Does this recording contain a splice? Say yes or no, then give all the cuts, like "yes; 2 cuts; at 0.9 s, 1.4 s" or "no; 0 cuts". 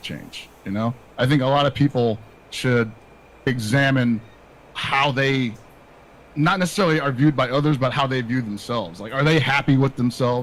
yes; 1 cut; at 3.5 s